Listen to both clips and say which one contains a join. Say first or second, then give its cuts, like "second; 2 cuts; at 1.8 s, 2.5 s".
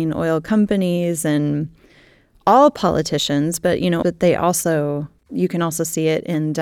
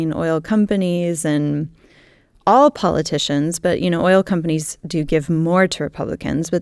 first; 2 cuts; at 4.0 s, 5.2 s